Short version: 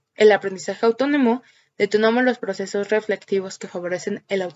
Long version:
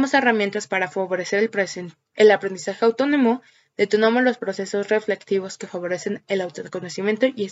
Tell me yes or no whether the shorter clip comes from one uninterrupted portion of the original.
yes